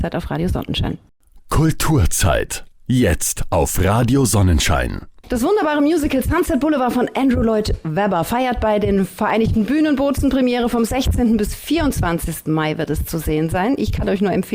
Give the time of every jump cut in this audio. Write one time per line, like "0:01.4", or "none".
none